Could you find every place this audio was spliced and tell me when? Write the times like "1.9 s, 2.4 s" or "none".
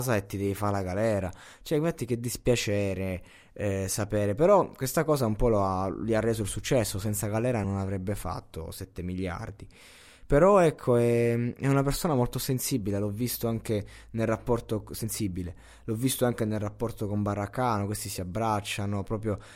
7.6 s